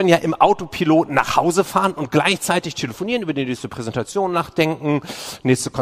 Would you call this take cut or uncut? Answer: uncut